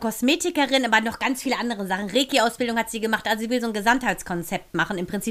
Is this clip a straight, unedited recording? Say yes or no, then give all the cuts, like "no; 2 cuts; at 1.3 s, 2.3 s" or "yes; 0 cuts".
yes; 0 cuts